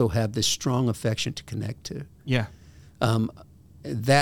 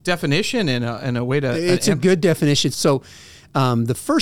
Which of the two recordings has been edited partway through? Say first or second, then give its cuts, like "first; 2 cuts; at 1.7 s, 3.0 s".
second; 1 cut; at 2.7 s